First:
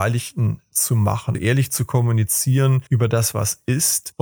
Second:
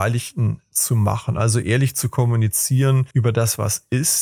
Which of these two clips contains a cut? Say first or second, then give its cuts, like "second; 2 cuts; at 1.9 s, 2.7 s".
first; 1 cut; at 1.3 s